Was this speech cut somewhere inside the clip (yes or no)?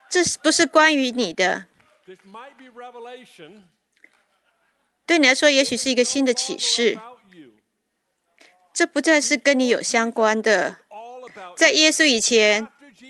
no